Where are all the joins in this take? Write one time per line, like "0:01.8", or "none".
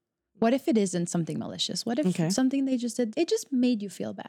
0:03.1